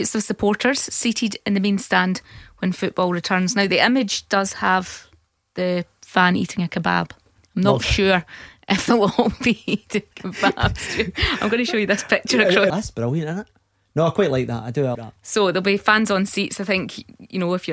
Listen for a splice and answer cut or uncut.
cut